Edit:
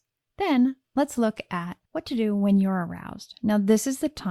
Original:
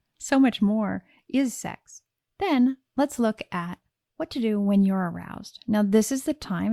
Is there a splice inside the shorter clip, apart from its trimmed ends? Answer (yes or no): yes